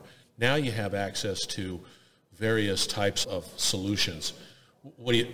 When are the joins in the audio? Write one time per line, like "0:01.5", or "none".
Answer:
0:03.2